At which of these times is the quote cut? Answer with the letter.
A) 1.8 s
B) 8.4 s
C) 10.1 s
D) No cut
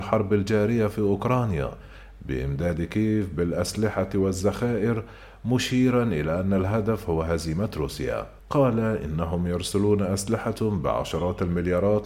B